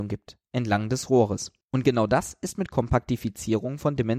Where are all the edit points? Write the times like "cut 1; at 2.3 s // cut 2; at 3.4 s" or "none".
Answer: cut 1; at 1.6 s